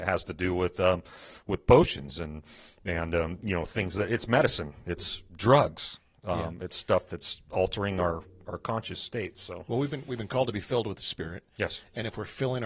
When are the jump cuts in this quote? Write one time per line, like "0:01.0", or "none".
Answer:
none

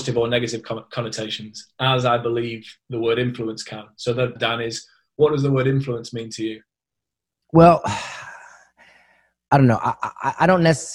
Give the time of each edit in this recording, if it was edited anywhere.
0:04.4

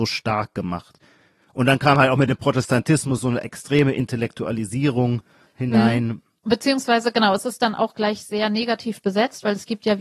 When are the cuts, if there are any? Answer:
none

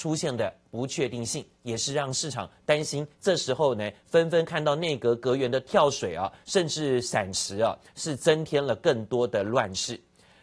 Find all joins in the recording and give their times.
none

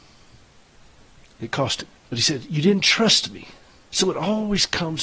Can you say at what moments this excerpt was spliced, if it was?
0:01.9
0:03.9

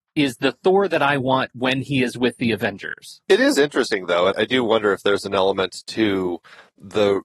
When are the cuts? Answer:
0:03.2
0:04.3

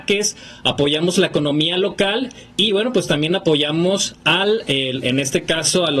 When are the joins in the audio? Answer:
none

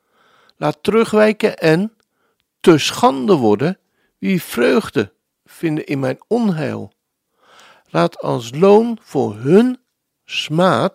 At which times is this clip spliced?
none

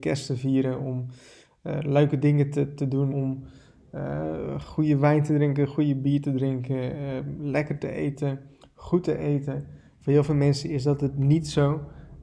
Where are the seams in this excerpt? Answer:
0:03.1

